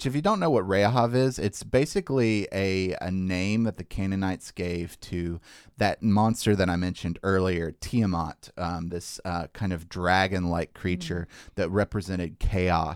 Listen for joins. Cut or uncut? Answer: uncut